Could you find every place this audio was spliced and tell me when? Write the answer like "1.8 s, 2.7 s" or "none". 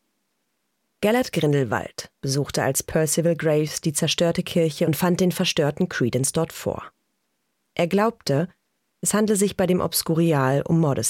none